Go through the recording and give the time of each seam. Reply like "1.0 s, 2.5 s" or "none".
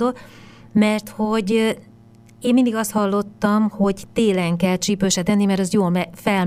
none